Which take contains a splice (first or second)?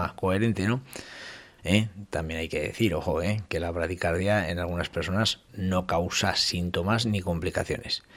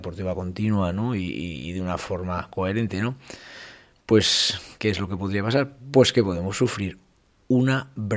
first